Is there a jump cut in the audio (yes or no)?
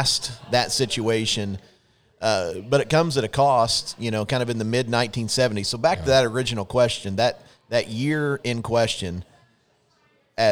no